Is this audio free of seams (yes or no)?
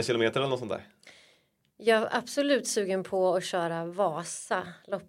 yes